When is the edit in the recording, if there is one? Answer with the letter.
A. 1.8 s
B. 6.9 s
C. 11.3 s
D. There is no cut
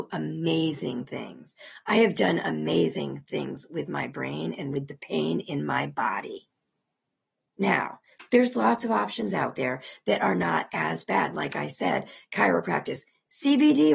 D